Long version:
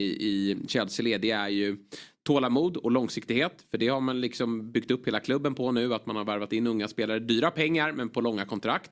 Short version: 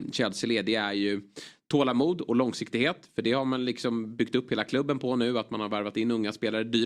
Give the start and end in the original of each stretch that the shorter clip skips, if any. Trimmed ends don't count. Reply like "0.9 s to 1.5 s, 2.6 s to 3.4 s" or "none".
none